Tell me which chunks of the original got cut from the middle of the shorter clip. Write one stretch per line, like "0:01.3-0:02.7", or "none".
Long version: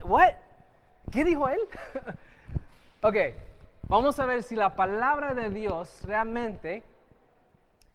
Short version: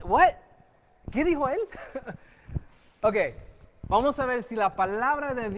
none